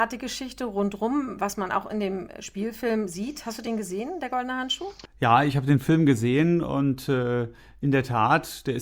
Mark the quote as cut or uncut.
uncut